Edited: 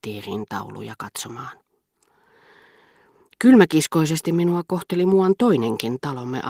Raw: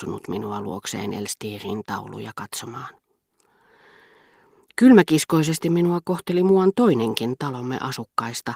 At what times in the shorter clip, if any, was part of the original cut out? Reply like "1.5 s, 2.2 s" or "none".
none